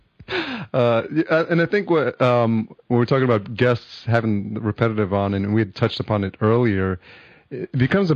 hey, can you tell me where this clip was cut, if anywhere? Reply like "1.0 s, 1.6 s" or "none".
none